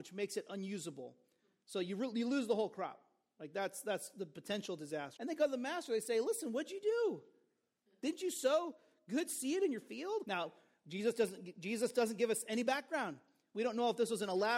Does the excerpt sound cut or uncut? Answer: cut